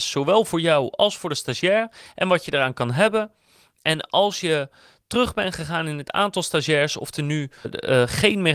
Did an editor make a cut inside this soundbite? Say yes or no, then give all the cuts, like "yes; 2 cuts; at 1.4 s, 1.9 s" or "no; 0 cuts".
yes; 1 cut; at 7.6 s